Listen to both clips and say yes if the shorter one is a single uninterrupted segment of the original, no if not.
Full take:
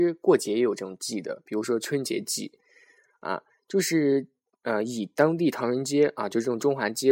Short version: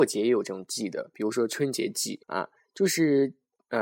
no